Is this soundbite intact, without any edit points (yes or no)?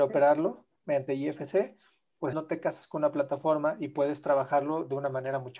no